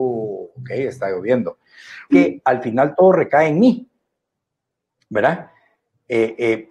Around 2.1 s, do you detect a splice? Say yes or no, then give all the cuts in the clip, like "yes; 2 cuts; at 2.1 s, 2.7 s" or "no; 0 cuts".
yes; 1 cut; at 2.1 s